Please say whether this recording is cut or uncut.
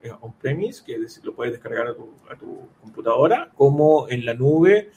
cut